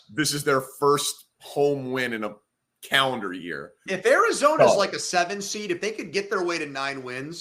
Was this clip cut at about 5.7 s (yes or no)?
no